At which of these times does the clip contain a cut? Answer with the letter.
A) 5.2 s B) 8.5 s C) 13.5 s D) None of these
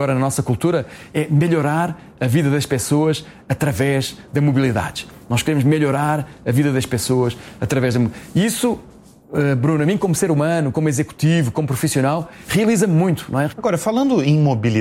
C